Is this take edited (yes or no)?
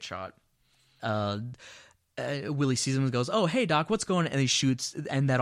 yes